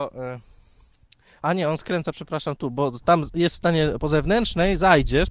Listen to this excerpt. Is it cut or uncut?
cut